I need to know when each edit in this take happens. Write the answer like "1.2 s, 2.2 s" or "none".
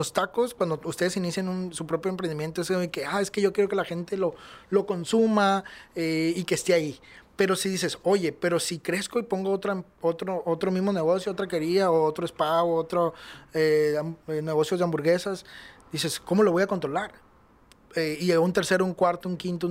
none